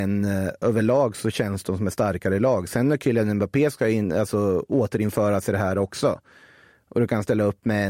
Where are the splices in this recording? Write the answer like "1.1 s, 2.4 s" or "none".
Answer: none